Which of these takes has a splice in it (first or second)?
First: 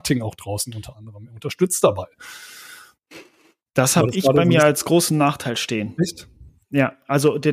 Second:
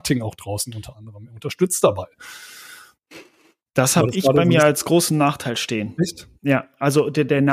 second